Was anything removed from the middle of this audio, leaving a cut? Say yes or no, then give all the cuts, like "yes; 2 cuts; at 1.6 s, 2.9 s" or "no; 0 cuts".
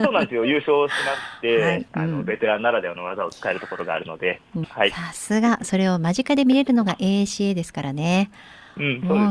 yes; 2 cuts; at 1.9 s, 4.6 s